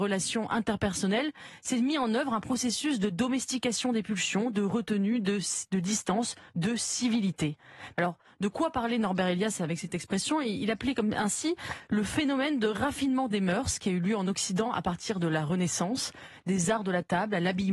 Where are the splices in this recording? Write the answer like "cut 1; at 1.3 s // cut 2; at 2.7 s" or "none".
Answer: cut 1; at 7.9 s